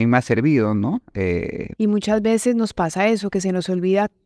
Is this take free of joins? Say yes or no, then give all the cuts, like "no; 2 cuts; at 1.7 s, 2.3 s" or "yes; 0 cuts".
no; 1 cut; at 1.7 s